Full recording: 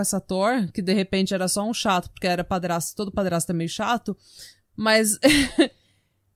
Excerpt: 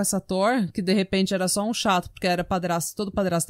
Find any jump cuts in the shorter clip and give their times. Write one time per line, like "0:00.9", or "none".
none